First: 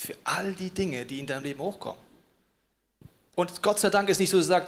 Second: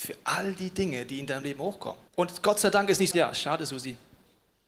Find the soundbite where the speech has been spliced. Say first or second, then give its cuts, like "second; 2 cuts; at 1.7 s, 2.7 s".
second; 2 cuts; at 2.1 s, 3.1 s